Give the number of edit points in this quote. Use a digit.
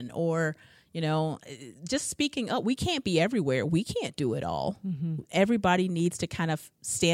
0